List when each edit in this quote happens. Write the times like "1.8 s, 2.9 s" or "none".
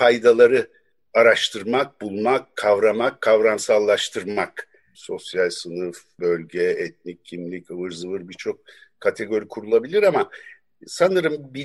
4.9 s